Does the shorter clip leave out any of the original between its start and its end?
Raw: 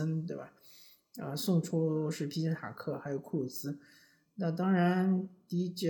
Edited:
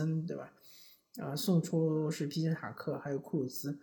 no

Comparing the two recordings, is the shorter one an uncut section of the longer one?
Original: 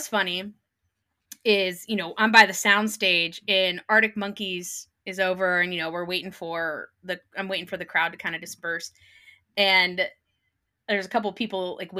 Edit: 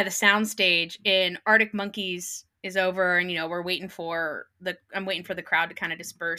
yes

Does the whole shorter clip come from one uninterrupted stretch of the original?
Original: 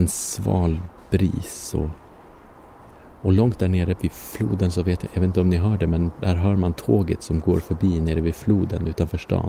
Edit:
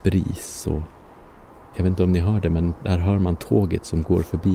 no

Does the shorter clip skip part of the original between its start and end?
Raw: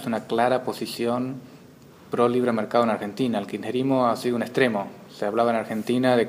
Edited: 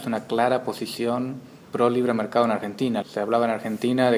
yes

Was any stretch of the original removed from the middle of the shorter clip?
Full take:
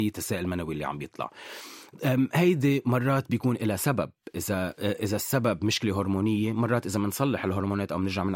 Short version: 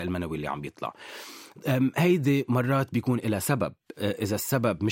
yes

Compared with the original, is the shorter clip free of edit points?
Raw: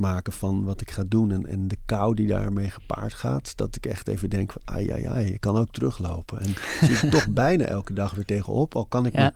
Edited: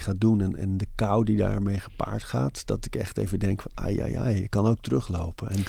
yes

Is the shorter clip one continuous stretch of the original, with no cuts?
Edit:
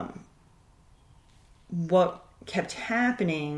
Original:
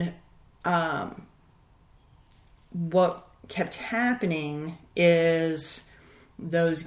yes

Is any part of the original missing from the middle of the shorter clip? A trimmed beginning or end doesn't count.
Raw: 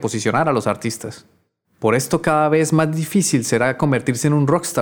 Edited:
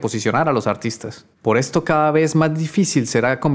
yes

